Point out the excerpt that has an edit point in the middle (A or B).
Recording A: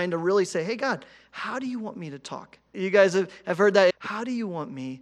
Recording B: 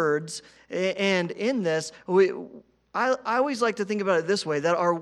A